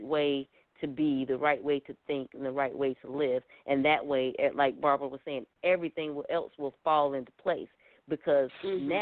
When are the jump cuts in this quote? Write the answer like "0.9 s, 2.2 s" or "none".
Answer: none